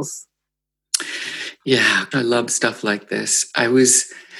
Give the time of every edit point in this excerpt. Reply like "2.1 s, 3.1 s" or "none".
2.1 s